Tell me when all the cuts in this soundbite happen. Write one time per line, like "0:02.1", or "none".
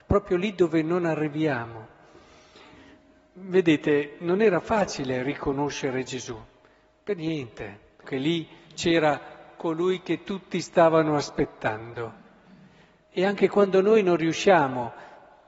0:08.0
0:13.0